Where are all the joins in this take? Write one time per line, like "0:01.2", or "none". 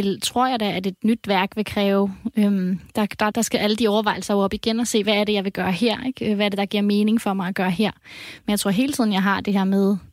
0:03.3